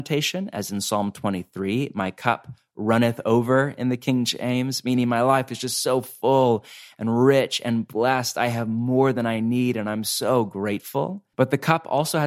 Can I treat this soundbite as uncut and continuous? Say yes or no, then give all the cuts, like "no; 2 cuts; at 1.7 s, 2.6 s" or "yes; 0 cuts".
yes; 0 cuts